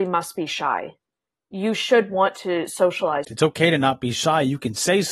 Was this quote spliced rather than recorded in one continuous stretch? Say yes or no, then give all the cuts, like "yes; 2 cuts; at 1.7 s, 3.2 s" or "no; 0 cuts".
yes; 1 cut; at 3.2 s